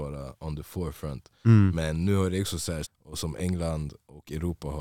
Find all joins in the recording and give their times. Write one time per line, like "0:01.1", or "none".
0:02.8